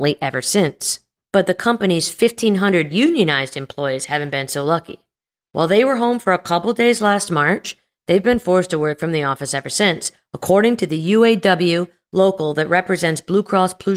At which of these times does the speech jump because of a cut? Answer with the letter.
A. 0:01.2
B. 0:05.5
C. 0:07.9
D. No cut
D